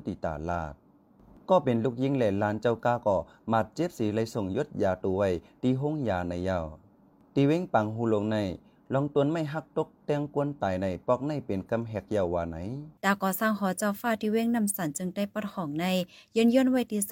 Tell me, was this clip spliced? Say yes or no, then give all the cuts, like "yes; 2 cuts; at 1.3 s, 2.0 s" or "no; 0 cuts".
yes; 1 cut; at 13.0 s